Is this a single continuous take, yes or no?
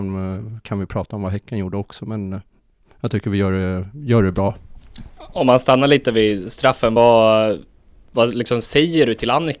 yes